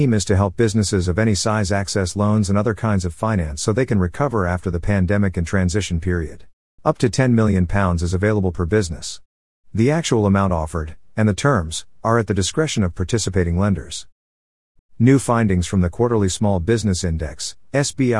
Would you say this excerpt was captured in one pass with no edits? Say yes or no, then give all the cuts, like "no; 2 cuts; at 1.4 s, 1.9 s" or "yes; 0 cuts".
no; 2 cuts; at 6.8 s, 14.8 s